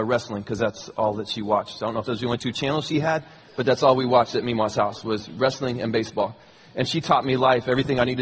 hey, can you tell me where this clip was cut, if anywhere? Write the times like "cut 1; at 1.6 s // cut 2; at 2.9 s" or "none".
none